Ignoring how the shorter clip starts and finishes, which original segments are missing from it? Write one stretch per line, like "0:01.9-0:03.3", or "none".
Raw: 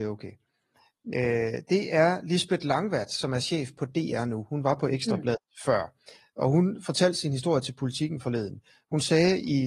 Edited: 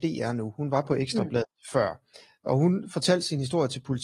none